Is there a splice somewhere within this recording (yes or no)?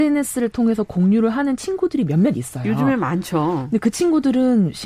no